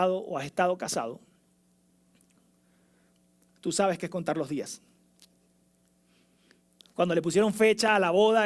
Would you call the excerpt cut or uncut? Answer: uncut